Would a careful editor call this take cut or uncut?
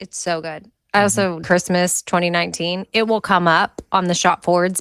cut